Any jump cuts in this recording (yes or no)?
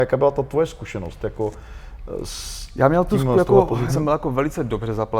yes